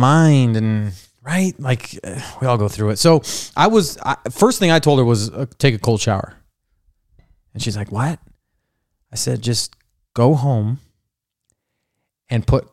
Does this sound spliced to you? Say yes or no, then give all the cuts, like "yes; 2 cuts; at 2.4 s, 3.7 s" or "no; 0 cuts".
no; 0 cuts